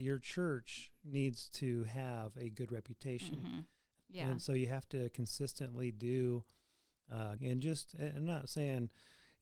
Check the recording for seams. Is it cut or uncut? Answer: cut